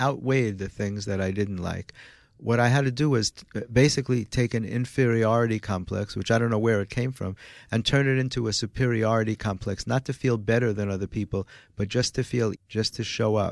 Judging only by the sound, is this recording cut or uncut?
cut